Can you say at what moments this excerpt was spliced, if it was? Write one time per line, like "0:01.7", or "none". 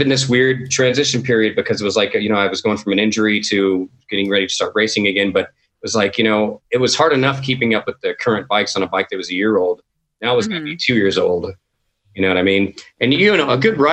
none